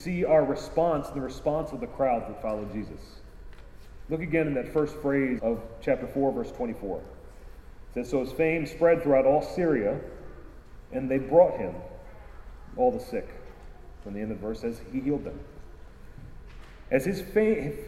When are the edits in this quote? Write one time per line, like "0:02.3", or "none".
0:05.4